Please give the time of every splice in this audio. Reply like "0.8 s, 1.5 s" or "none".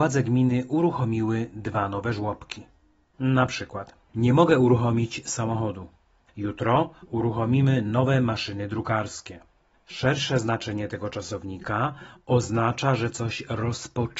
3.1 s